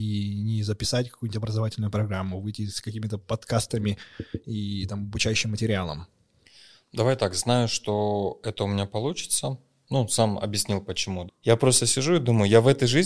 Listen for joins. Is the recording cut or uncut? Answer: cut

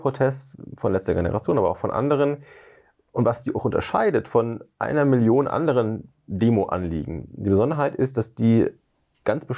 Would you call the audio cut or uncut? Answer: uncut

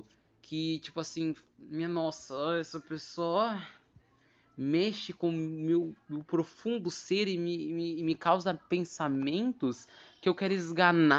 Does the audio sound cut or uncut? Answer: uncut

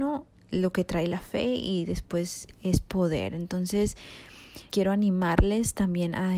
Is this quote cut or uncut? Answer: cut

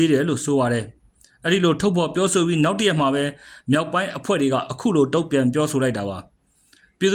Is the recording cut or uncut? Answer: uncut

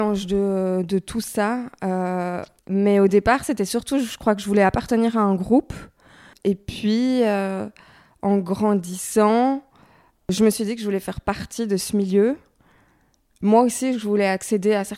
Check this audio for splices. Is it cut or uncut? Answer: uncut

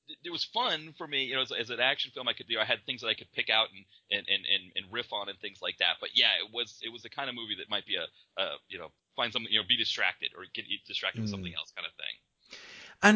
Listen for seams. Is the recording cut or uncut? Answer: uncut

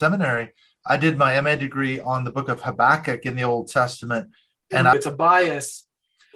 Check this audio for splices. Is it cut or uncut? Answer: cut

